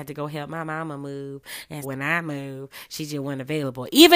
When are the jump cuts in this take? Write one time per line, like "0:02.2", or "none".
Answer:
0:01.8